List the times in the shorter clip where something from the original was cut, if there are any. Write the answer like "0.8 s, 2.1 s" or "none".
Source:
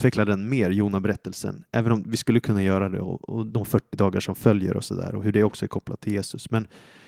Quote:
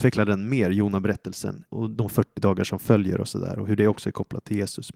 1.7 s

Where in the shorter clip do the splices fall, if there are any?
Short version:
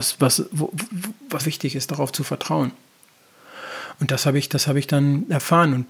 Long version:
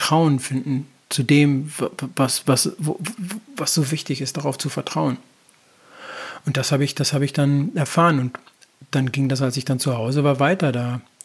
1.4 s

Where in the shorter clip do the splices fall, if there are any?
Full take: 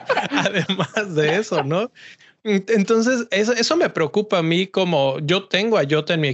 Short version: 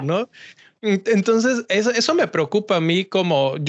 none

